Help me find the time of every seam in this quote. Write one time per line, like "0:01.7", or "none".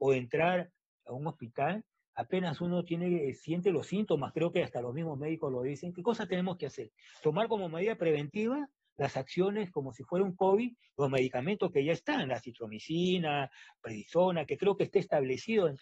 none